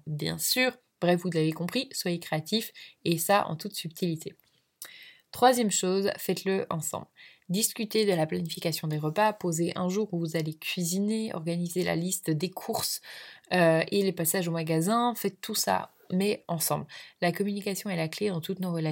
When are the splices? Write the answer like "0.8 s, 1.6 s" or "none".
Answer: none